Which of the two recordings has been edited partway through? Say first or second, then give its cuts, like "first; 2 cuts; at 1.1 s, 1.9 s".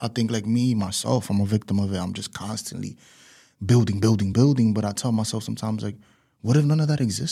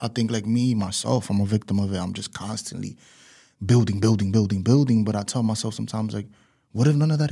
first; 1 cut; at 4.3 s